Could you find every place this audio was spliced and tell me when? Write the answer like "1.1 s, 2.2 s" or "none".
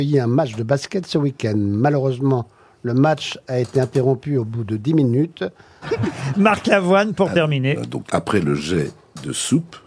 5.8 s, 8.1 s